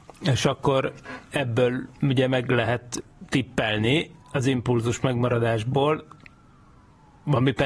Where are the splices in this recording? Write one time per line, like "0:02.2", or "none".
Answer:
none